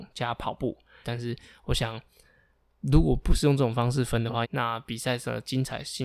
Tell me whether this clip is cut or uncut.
cut